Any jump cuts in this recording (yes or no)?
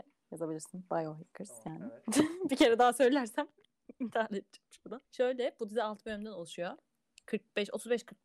yes